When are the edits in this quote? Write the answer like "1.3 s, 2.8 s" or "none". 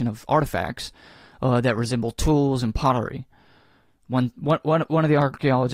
none